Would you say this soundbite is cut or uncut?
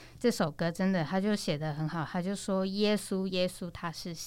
uncut